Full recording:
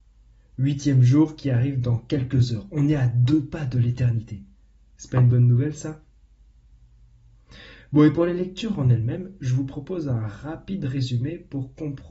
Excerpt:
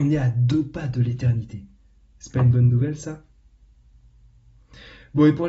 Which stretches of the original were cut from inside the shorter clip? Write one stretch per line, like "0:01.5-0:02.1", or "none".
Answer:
none